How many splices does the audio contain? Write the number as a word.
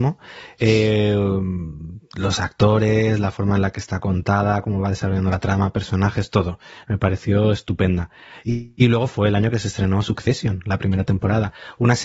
zero